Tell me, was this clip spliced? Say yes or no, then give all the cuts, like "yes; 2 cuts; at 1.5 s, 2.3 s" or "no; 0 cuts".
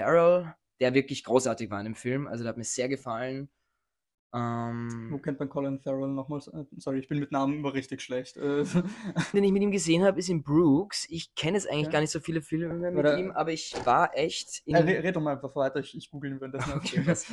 yes; 1 cut; at 9.3 s